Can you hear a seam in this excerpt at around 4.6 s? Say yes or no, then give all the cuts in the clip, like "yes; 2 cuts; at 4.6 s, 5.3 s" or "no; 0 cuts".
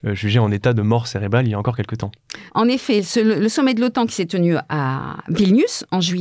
no; 1 cut; at 2.5 s